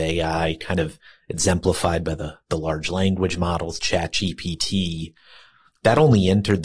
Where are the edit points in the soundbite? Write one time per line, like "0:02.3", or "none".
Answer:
none